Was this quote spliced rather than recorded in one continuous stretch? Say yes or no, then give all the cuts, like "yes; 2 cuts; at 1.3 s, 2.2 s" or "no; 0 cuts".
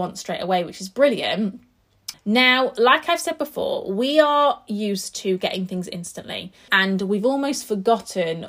yes; 2 cuts; at 2.1 s, 6.7 s